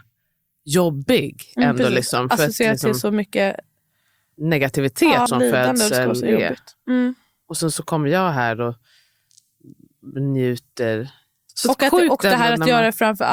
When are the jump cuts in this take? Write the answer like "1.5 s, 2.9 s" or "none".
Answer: 5.3 s